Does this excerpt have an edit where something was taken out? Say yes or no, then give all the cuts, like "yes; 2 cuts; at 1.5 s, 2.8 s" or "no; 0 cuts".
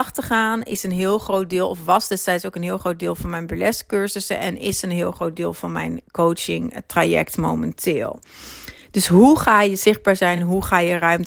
no; 0 cuts